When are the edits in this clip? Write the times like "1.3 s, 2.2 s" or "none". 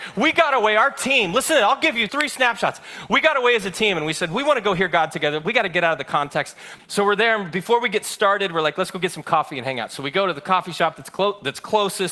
2.1 s, 6.8 s

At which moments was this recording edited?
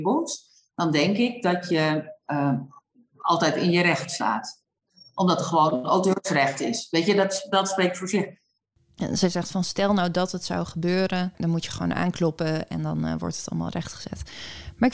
none

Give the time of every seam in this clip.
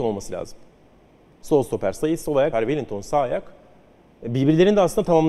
2.5 s

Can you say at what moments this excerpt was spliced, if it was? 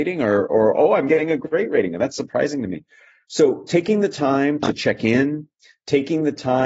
none

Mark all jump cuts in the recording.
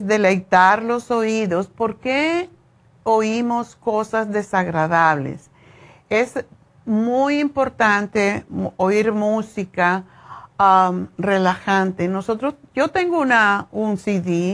none

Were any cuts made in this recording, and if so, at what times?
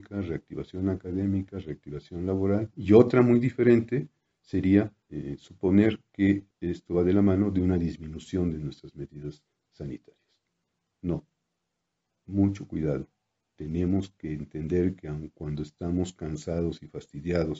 5.0 s, 6.5 s

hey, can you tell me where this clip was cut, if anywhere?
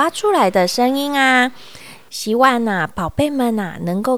2.1 s

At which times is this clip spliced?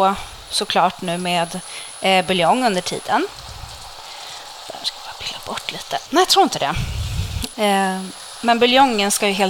6.1 s, 7.5 s

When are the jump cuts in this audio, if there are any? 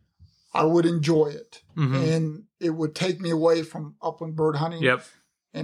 none

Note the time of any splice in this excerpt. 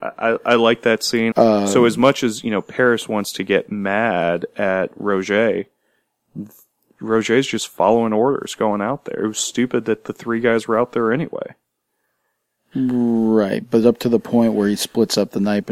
1.3 s

